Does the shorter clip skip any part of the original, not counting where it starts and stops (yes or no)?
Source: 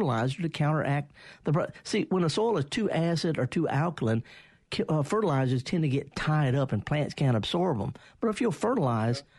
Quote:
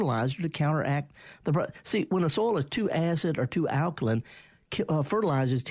no